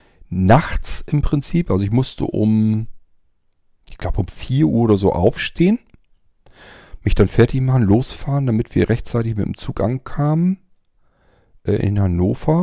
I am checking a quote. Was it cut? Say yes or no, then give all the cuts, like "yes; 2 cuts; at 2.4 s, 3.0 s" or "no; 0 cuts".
no; 0 cuts